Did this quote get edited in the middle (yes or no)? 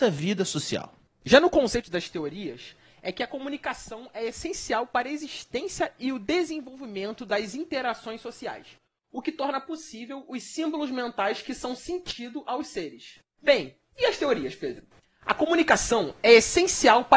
no